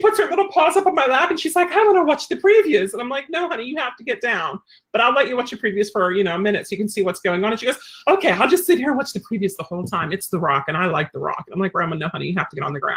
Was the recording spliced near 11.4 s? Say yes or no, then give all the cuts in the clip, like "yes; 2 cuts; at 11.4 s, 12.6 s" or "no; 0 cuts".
no; 0 cuts